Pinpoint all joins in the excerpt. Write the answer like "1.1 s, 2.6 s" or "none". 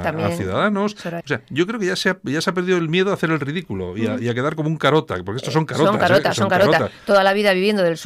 1.2 s